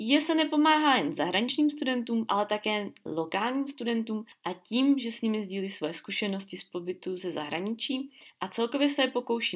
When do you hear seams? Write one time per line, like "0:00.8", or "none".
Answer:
none